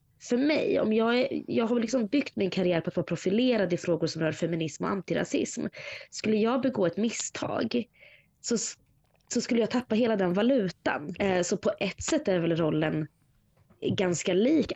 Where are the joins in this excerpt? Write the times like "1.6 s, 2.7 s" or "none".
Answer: 11.2 s